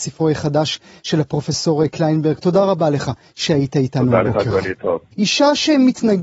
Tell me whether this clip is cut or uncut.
cut